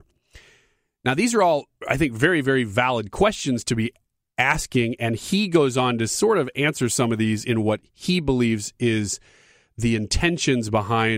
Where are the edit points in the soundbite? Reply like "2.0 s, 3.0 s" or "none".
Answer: none

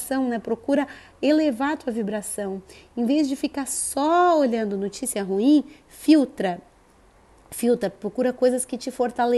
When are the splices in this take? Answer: none

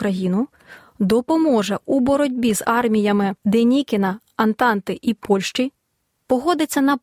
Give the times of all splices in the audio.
none

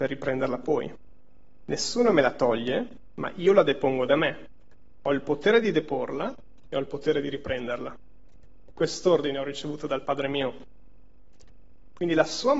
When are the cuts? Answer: none

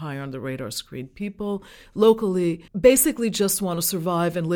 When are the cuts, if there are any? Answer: 2.7 s

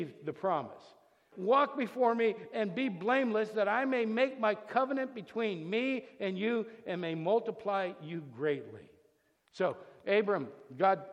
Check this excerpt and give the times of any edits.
1.3 s, 9.4 s

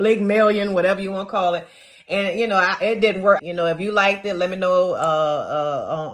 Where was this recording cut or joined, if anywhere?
3.4 s

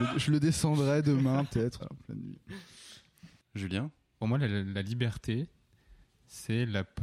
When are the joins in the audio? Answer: 1.8 s, 4.2 s

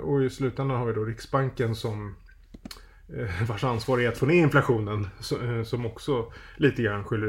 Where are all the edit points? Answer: none

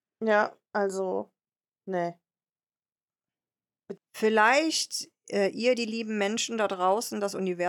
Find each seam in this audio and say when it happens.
4.0 s

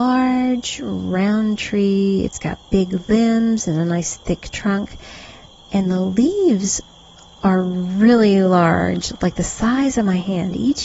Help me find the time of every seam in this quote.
none

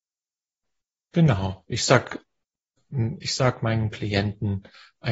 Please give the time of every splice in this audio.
none

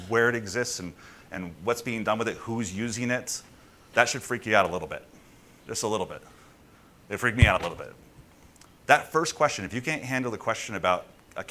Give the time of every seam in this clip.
3.9 s, 8.7 s

